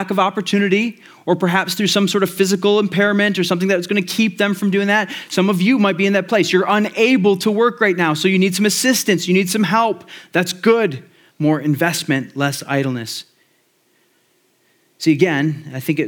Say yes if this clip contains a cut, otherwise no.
yes